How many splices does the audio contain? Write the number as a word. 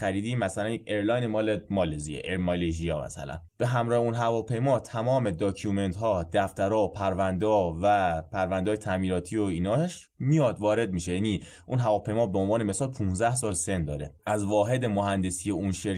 two